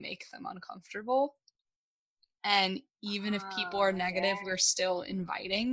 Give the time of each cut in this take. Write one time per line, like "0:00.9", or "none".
none